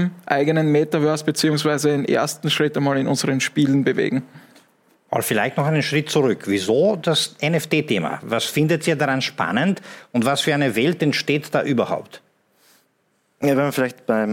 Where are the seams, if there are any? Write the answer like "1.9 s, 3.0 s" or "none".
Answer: none